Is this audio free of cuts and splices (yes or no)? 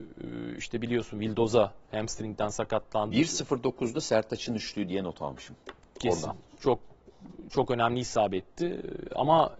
no